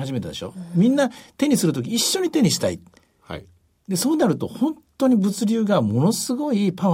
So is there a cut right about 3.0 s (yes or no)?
no